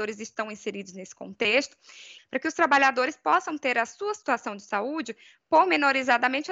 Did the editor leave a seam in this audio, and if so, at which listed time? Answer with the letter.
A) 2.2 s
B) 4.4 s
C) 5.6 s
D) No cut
A